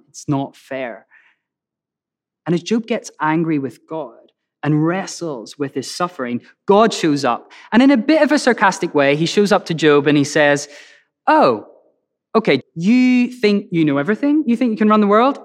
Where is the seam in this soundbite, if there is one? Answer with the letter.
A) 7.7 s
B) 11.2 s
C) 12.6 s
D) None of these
C